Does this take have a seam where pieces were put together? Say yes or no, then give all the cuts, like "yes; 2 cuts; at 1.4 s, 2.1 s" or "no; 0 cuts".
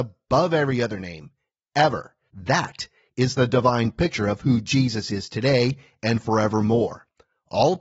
yes; 1 cut; at 2.3 s